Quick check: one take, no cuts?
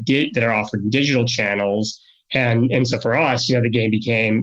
no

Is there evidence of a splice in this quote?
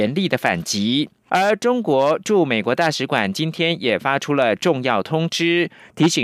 yes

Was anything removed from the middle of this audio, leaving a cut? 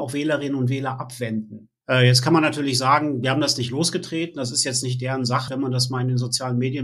yes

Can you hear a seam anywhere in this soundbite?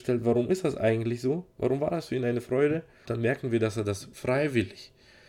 yes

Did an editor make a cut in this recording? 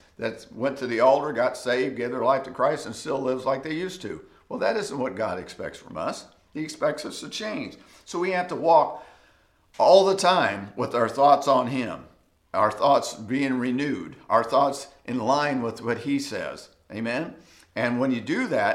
no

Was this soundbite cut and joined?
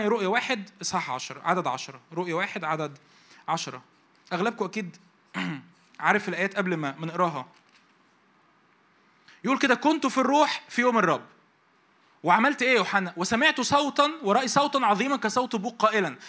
no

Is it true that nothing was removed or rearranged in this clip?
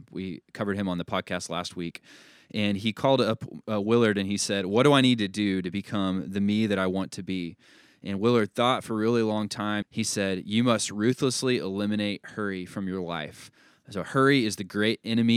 no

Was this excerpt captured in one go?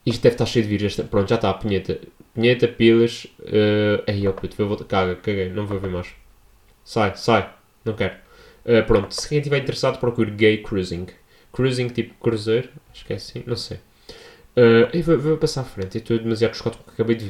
yes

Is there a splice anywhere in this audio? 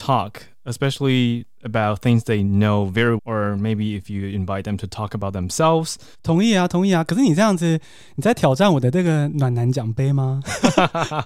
yes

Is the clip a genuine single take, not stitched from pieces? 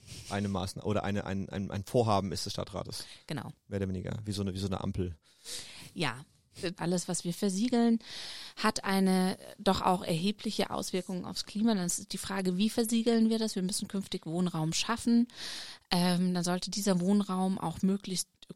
no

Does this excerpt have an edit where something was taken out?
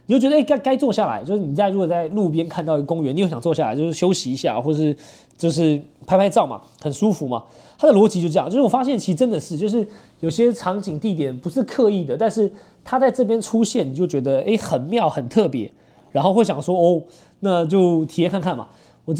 no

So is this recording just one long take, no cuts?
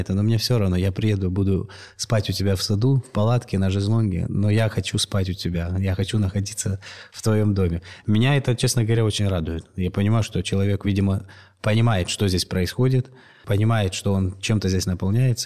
yes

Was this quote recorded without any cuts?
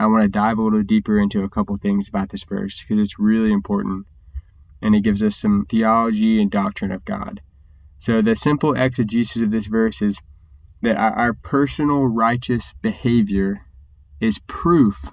no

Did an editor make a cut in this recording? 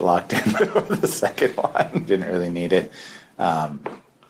yes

